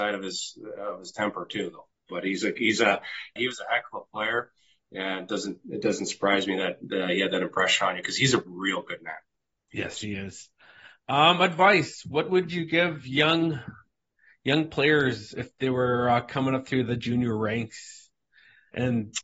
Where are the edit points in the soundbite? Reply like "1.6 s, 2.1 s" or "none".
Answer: 3.4 s